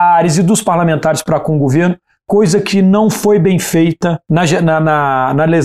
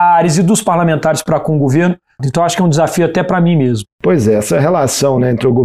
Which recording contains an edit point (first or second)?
second